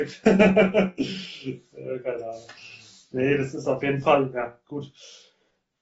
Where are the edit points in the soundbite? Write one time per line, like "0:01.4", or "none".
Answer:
none

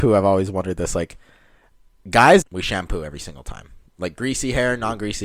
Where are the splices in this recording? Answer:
0:02.4
0:03.9

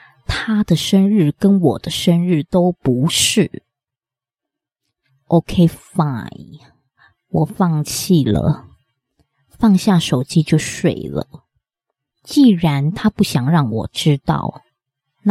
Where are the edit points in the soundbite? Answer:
0:12.1

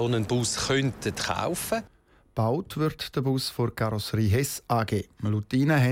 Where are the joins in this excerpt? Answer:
none

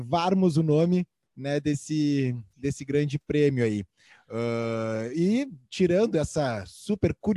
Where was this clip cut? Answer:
none

